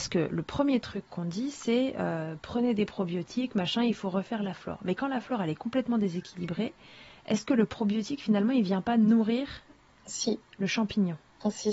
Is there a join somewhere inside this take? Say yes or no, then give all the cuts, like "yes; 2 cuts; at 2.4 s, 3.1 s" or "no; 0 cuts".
no; 0 cuts